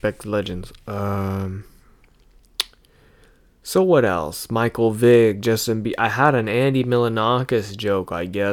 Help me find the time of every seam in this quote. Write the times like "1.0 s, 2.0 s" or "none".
none